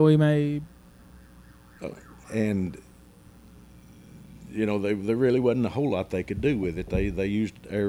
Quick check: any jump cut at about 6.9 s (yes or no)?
no